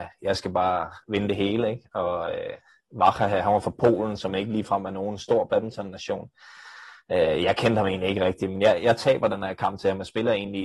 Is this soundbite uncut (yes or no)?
yes